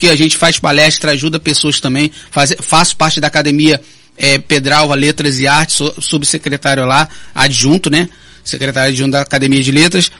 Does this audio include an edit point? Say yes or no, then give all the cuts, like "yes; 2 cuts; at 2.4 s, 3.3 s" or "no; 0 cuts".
no; 0 cuts